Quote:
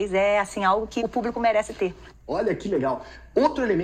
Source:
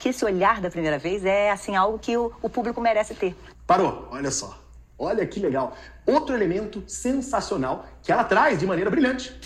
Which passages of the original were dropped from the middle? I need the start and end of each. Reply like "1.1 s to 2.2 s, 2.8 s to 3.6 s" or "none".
2.1 s to 2.4 s, 3.6 s to 4.9 s